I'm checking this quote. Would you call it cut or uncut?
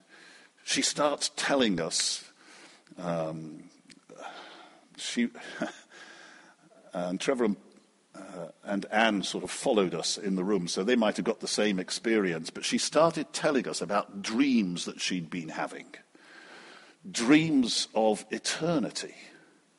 uncut